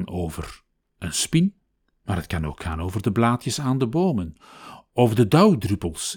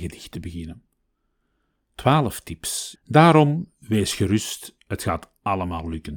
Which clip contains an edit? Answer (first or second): second